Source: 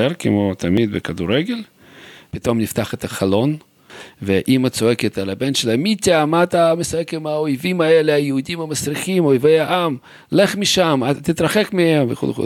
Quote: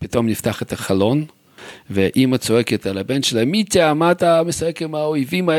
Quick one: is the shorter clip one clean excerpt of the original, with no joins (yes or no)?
yes